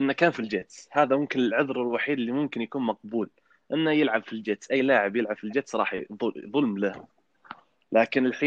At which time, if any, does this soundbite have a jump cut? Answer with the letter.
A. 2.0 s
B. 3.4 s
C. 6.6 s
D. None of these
D